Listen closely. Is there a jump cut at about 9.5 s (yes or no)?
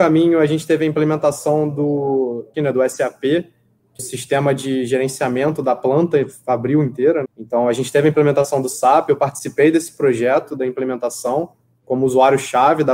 no